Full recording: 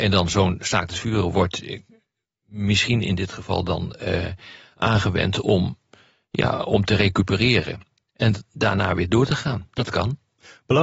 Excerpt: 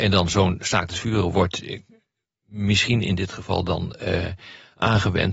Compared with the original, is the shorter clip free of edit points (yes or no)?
yes